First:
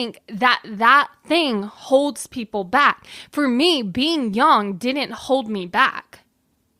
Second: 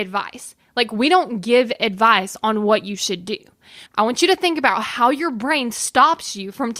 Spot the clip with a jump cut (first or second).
second